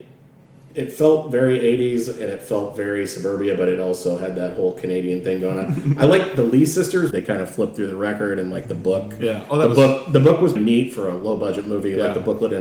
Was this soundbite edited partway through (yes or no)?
yes